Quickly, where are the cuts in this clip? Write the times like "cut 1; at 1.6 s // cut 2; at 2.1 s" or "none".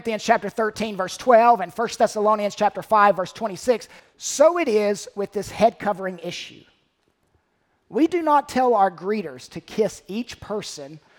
cut 1; at 4.0 s